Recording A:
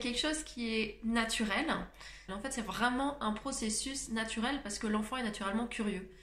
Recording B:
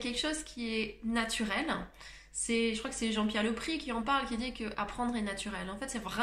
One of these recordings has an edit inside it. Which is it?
A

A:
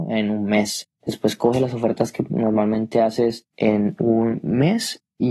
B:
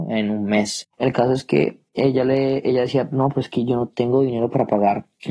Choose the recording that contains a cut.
B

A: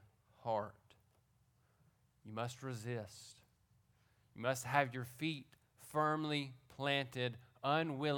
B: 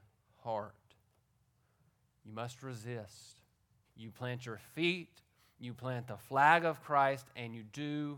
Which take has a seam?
B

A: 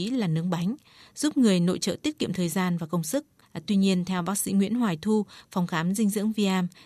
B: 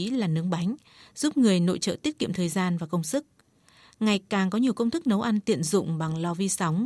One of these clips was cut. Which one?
A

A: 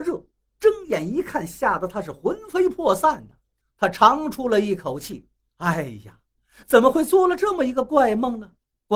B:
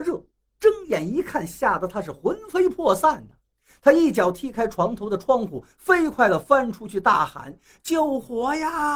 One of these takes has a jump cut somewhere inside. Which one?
A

